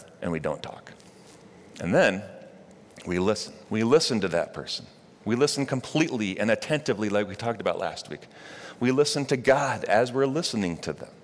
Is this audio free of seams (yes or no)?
no